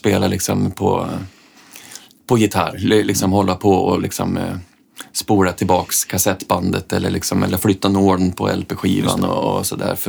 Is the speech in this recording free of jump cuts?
yes; 0 cuts

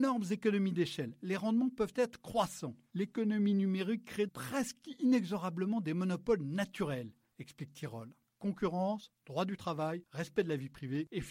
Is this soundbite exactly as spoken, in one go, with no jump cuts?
no; 2 cuts; at 4.3 s, 8.3 s

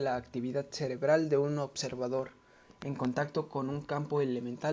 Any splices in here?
no; 0 cuts

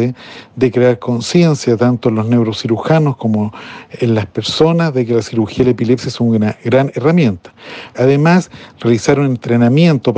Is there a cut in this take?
yes; 1 cut; at 7.9 s

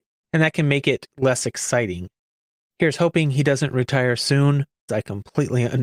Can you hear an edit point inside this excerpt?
yes; 1 cut; at 4.9 s

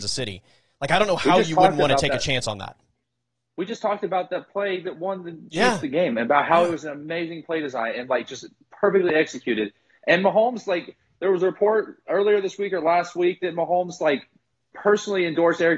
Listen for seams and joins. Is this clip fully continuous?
yes; 0 cuts

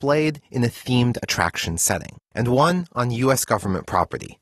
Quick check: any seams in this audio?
no; 0 cuts

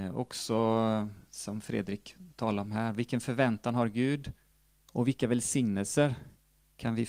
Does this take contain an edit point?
no; 0 cuts

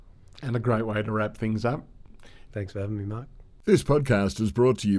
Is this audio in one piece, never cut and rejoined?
no; 1 cut; at 2.5 s

